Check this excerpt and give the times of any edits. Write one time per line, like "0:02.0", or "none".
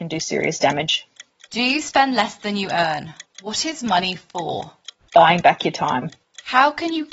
0:03.2